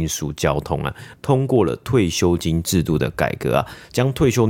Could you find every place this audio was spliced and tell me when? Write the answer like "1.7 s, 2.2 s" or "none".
1.1 s